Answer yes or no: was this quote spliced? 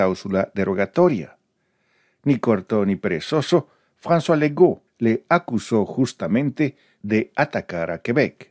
yes